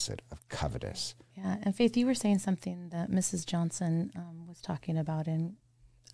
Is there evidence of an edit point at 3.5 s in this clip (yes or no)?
no